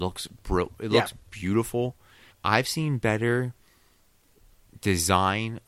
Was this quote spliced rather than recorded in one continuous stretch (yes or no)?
yes